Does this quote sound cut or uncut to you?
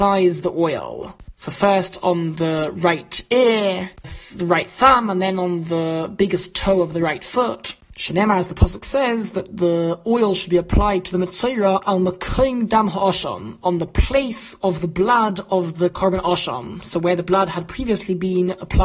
cut